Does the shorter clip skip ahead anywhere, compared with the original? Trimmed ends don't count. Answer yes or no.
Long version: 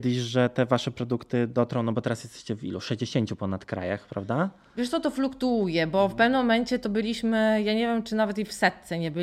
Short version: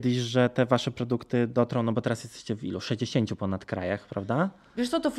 no